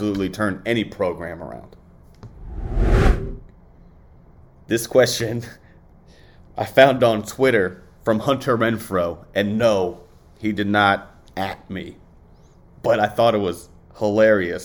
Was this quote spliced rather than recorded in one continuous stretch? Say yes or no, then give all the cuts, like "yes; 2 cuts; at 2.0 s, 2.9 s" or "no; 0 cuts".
no; 0 cuts